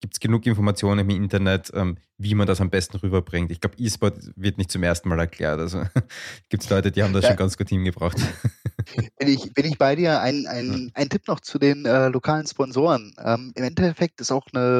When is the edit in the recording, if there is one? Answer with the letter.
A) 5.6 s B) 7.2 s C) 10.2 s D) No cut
D